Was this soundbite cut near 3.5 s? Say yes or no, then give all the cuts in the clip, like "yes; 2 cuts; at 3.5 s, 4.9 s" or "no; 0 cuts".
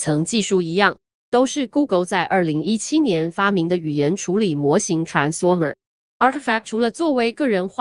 no; 1 cut; at 6.0 s